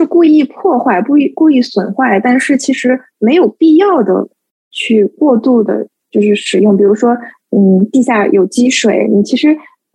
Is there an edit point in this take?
no; 0 cuts

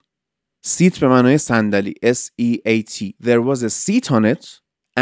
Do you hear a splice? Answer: yes; 1 cut; at 3.2 s

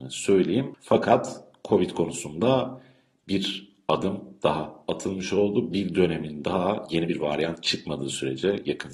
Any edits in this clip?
no; 0 cuts

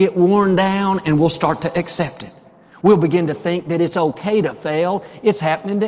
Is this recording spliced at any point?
no; 0 cuts

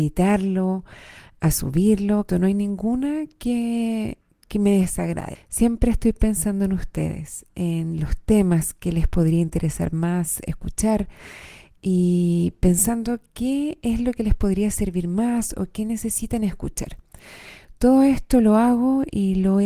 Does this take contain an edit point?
yes; 2 cuts; at 2.3 s, 5.3 s

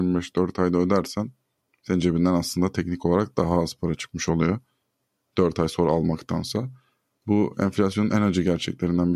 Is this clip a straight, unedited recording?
yes; 0 cuts

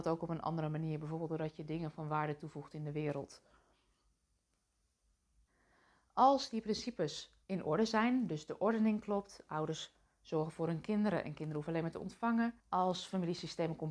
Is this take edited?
yes; 2 cuts; at 7.4 s, 12.6 s

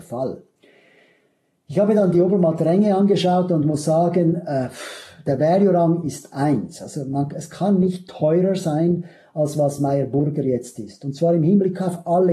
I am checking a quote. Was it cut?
no; 0 cuts

